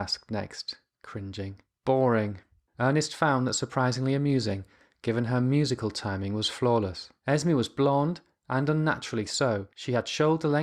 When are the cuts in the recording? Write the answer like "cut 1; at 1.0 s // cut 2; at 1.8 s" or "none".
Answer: cut 1; at 2.7 s